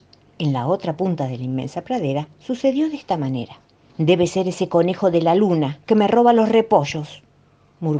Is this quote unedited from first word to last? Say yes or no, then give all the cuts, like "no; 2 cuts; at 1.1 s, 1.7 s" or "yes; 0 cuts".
no; 1 cut; at 3.9 s